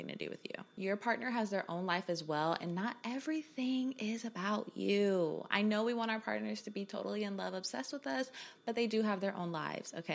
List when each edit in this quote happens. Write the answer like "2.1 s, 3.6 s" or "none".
none